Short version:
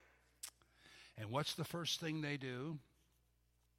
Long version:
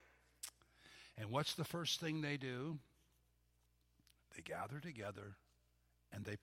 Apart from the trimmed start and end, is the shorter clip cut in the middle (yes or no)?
no